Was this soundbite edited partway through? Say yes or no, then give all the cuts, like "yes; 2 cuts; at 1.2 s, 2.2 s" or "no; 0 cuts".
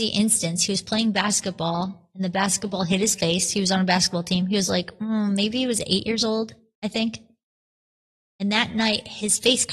no; 0 cuts